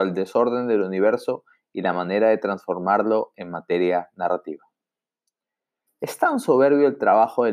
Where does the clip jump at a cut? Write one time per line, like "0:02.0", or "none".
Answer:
0:05.9